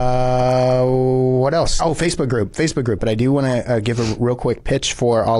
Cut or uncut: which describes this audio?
cut